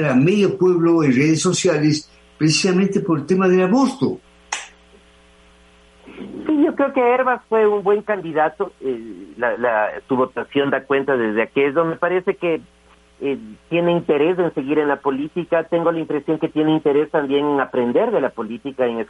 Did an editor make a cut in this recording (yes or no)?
no